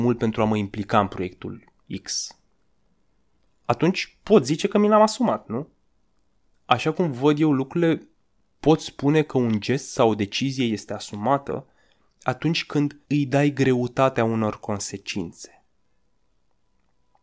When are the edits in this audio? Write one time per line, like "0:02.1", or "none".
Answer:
0:06.4
0:13.0

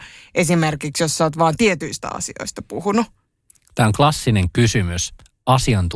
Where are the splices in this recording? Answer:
none

